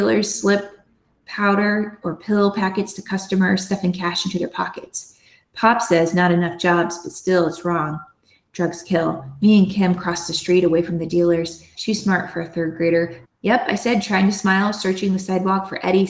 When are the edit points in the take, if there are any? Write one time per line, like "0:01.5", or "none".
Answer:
0:11.7
0:13.2